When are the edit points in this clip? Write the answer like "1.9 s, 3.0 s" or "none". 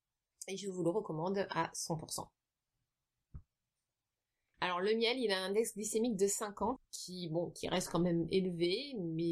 4.5 s, 6.8 s